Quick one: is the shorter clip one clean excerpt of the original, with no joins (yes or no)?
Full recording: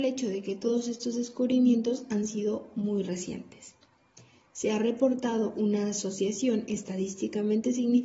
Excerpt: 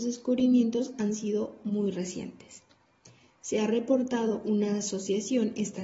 yes